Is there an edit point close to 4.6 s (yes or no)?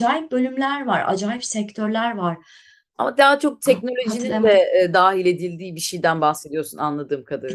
no